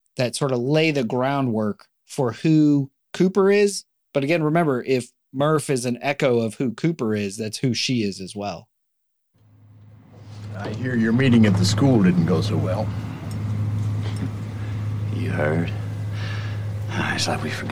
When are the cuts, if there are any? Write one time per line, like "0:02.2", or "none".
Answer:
none